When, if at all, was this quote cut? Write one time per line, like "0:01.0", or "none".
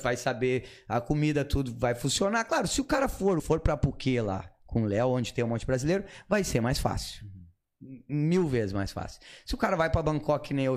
0:03.4